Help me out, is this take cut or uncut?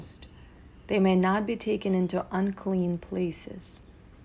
uncut